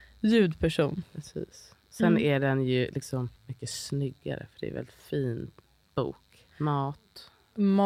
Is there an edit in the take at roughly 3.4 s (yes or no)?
yes